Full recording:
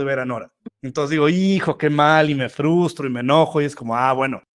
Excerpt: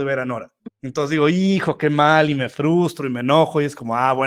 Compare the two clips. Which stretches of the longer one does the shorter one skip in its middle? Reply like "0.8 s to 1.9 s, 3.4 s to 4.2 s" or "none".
none